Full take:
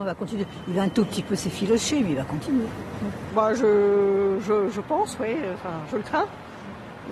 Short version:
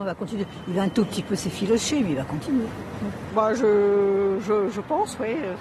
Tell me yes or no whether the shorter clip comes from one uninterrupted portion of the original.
yes